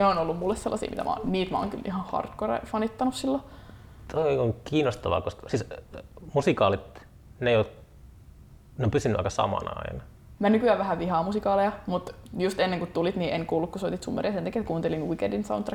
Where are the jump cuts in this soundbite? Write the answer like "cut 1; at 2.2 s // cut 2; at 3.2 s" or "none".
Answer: cut 1; at 10.4 s